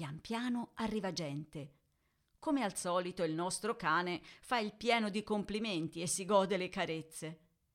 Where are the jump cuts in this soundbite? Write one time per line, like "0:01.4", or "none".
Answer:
none